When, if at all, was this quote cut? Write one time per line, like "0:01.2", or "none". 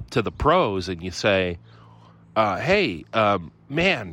none